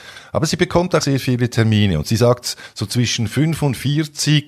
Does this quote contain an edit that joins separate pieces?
yes; 1 cut; at 1.0 s

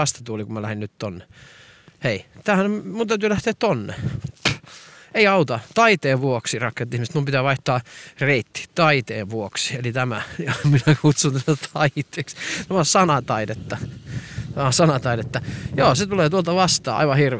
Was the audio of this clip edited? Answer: no; 0 cuts

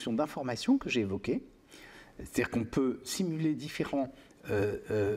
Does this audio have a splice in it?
no; 0 cuts

